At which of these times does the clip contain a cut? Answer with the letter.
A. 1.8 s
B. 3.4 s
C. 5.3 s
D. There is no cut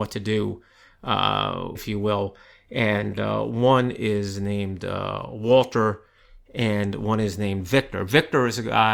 A